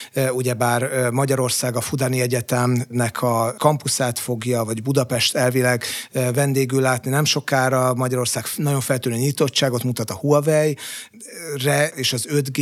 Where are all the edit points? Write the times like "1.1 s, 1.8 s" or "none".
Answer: none